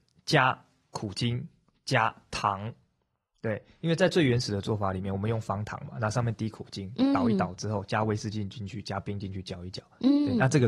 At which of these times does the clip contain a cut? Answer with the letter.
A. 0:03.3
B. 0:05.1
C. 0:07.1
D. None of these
D